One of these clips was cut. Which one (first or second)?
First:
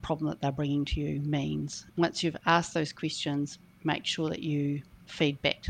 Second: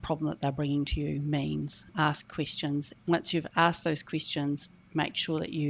first